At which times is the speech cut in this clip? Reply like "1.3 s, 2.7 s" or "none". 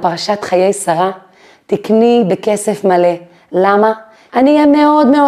4.3 s